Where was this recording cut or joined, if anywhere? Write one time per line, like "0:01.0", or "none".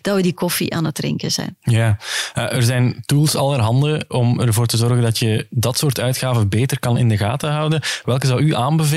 0:04.1